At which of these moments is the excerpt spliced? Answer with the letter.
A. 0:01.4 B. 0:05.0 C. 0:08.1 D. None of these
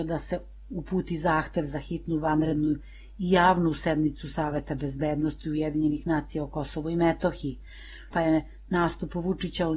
C